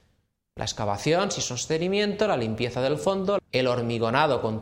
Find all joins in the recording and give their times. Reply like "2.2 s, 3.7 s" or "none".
3.4 s